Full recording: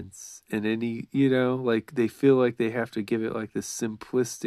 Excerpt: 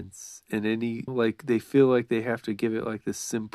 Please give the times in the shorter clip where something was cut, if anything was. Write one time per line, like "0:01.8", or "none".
0:01.1